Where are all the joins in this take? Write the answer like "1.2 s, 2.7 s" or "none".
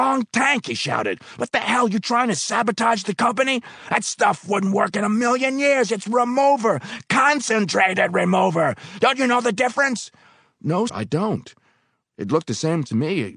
10.9 s

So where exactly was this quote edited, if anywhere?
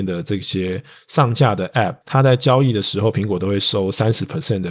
2.0 s

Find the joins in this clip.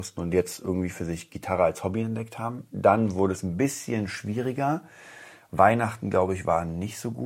none

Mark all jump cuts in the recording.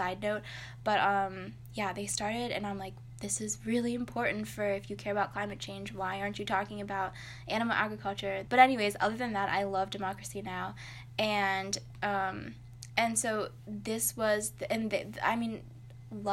8.5 s

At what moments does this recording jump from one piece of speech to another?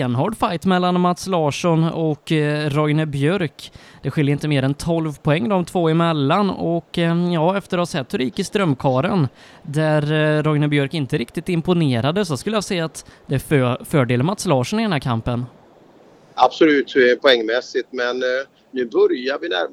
none

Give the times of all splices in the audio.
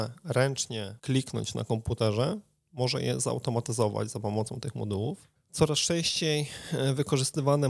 1.0 s

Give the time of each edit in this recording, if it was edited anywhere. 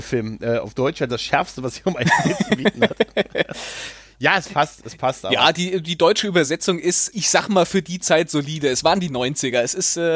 7.1 s

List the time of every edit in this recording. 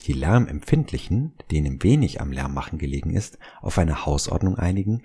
none

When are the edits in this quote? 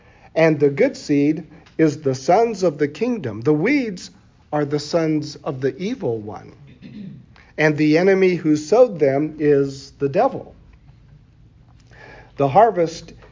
none

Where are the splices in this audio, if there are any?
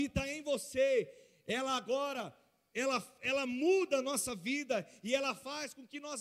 none

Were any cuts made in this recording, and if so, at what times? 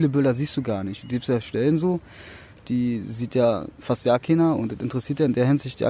2.6 s

